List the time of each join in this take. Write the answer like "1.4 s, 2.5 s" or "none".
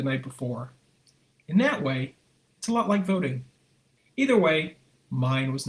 4.1 s